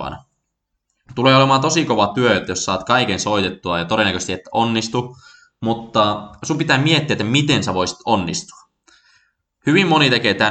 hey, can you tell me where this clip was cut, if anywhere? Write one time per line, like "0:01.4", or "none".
none